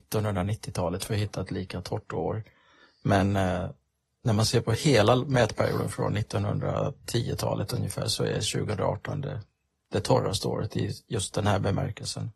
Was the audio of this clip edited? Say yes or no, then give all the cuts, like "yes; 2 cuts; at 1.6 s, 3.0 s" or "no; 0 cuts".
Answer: no; 0 cuts